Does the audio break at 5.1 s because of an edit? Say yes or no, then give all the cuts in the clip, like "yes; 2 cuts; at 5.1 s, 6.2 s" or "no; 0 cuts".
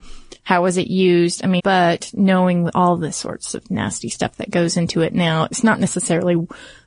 no; 1 cut; at 1.6 s